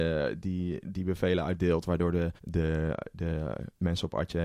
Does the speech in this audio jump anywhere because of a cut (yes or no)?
yes